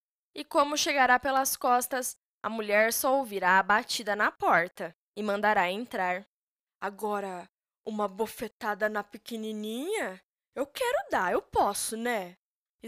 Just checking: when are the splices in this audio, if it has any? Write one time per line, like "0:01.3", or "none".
0:06.7